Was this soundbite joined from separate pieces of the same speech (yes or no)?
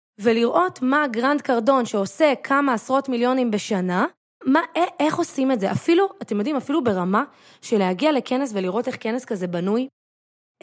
yes